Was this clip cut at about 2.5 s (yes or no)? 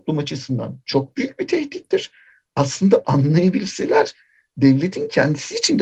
no